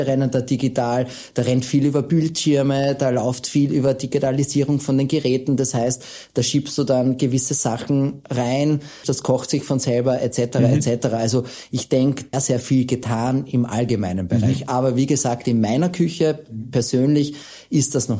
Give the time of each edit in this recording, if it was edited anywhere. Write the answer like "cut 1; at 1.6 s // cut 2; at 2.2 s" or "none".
cut 1; at 9.0 s // cut 2; at 12.3 s